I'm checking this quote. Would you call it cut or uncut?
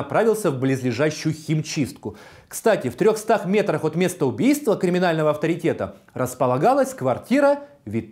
uncut